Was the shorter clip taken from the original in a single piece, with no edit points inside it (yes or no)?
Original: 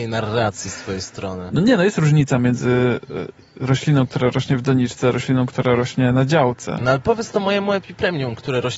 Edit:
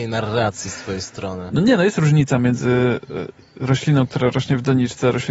yes